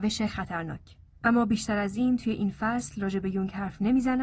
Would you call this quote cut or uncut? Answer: cut